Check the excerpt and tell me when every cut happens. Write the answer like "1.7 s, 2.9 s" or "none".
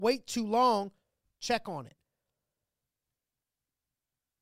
1.2 s